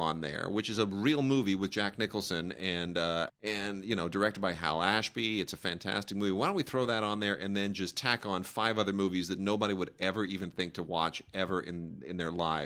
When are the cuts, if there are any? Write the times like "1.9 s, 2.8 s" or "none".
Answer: 3.3 s